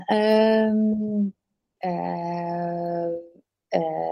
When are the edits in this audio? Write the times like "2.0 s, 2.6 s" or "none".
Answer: 1.8 s

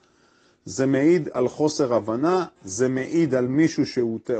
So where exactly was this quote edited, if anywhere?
none

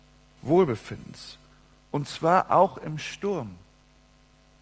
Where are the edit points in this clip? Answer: none

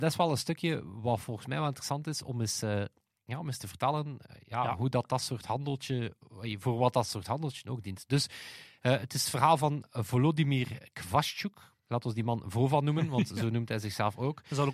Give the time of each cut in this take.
none

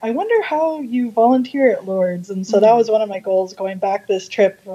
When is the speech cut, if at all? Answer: none

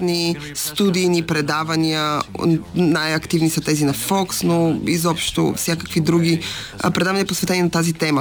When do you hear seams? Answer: none

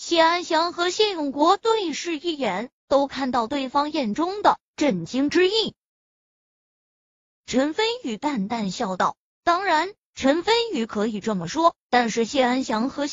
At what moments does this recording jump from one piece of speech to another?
6.7 s, 9.3 s

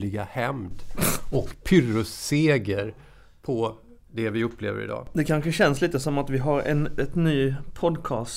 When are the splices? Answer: none

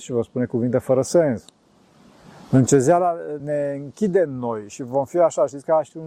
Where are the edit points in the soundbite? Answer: 3.4 s

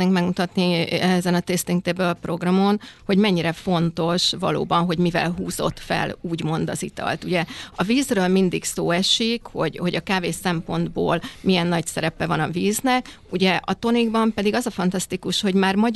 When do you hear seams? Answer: none

